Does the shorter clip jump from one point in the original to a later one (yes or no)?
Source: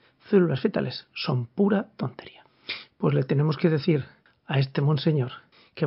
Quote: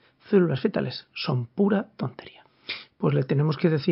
no